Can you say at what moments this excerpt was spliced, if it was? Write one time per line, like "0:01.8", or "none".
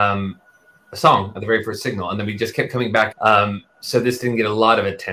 0:03.1